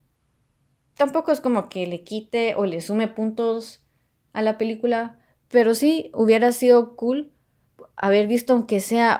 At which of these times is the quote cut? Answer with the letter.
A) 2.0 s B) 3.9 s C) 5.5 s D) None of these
D